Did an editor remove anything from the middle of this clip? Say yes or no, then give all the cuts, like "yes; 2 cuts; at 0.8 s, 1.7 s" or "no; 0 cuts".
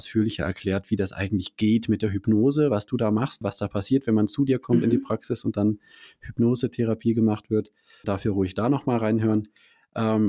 yes; 2 cuts; at 3.4 s, 8.0 s